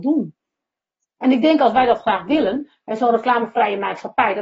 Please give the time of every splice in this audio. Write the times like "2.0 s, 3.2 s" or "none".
none